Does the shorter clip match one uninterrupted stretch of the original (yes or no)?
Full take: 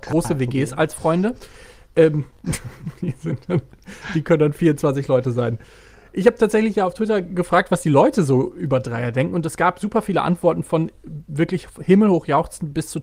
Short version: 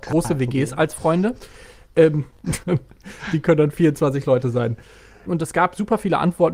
no